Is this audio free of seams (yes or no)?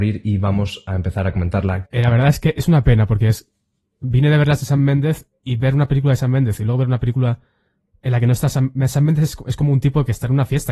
no